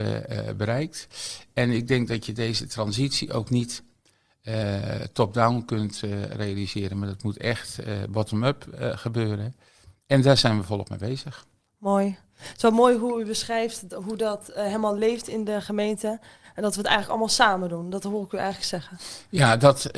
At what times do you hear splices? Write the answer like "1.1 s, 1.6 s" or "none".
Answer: none